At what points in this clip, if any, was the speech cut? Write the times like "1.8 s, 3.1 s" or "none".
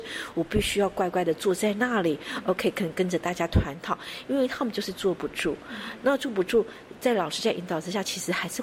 none